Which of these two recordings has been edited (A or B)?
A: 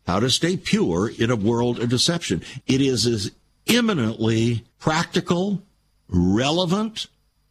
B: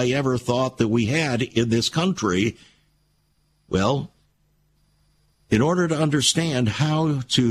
A